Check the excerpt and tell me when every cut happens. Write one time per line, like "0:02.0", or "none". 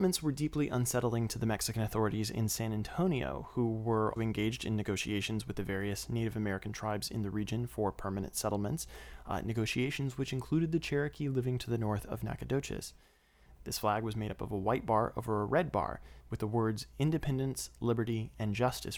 0:04.2
0:13.6
0:16.2